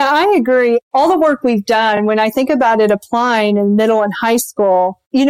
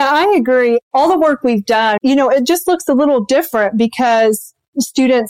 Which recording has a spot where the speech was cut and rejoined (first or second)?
second